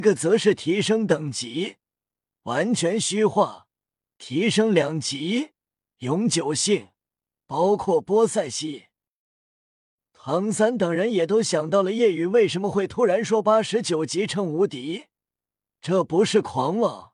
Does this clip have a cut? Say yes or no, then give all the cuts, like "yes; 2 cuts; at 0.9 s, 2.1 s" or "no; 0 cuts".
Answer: yes; 1 cut; at 7.3 s